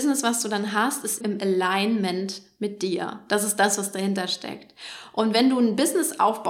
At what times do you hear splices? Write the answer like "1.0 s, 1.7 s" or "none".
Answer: 1.2 s